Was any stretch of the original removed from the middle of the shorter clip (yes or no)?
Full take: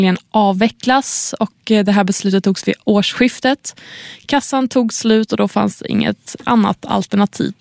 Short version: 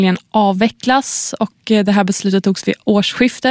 no